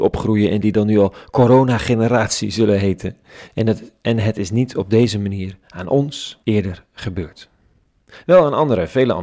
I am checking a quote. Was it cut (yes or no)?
yes